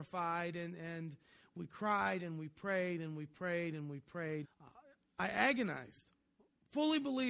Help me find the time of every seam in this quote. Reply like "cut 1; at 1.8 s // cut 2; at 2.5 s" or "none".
cut 1; at 4.4 s